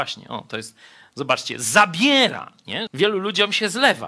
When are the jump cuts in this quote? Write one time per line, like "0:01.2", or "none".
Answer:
0:02.9